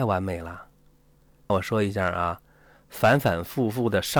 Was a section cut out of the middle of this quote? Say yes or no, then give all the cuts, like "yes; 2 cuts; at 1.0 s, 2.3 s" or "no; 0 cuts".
yes; 1 cut; at 1.5 s